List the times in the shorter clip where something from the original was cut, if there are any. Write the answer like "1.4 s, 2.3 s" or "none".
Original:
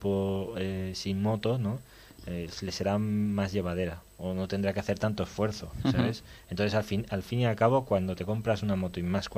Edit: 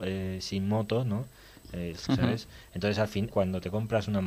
2.1 s, 3.3 s